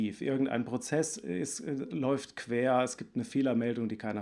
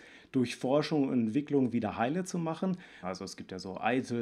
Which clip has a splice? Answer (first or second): second